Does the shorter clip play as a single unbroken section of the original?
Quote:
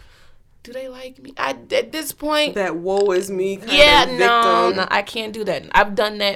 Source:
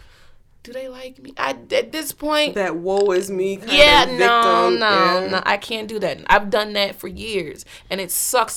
no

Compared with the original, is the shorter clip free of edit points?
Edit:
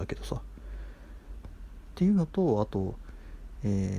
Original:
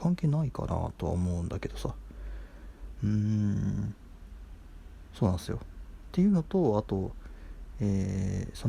no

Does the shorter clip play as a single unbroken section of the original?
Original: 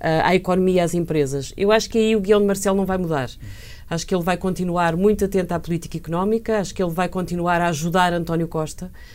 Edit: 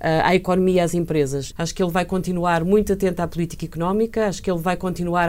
no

